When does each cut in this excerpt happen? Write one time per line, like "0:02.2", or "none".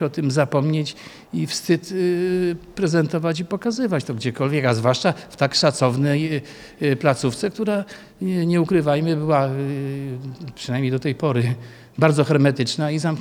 none

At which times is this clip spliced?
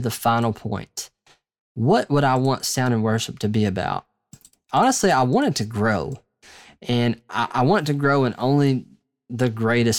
none

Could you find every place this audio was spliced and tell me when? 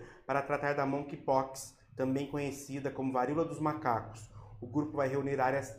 none

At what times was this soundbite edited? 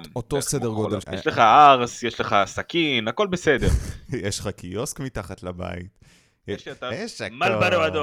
0:01.0
0:06.9

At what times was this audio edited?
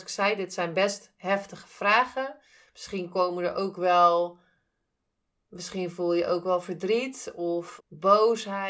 0:07.8

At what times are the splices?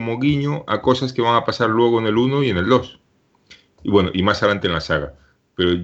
none

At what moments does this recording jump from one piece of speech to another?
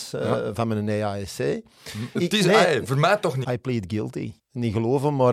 0:02.2
0:03.4

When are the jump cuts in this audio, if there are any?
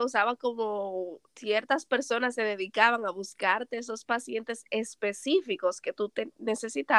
0:01.3

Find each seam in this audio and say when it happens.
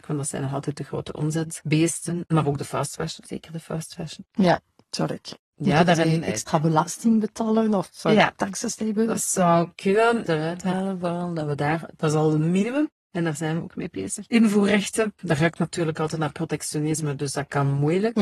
0:10.3

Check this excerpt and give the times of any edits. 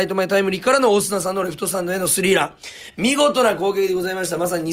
none

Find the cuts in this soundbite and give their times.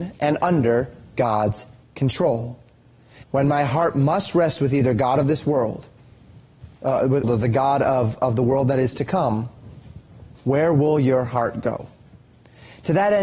0:03.2
0:07.2

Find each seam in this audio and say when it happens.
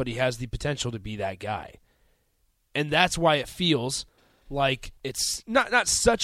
0:05.0

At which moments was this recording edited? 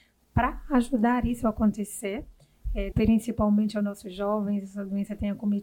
0:02.9

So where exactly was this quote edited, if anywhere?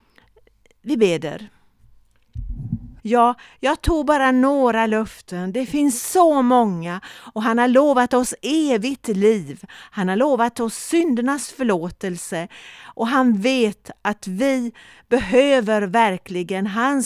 0:03.0

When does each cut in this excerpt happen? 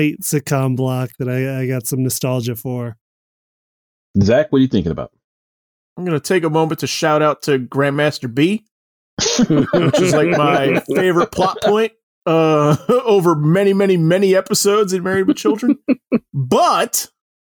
none

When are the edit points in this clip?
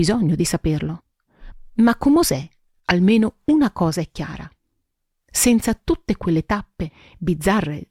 none

